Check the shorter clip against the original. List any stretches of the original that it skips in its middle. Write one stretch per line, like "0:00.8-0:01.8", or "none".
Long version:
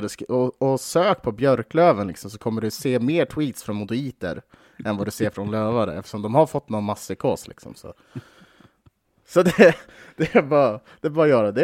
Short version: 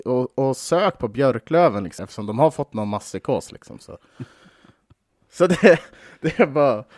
0:02.2-0:05.9